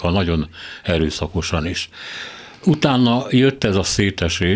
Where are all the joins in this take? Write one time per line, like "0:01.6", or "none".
none